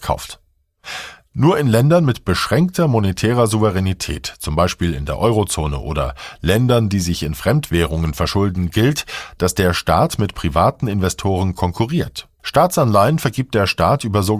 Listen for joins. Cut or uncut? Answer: cut